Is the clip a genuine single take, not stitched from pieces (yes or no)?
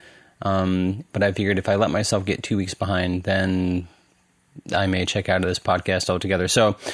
yes